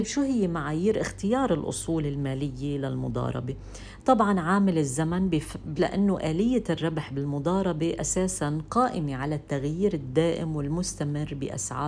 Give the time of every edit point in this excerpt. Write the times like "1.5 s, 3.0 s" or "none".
5.8 s